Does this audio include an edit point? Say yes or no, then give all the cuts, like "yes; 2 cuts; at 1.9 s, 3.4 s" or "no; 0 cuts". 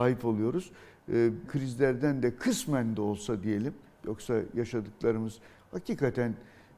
yes; 1 cut; at 1.5 s